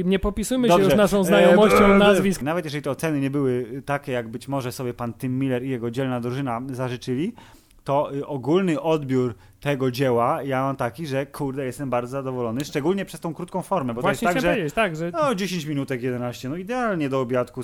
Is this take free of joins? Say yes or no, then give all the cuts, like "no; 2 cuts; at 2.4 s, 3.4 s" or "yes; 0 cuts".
no; 1 cut; at 2.4 s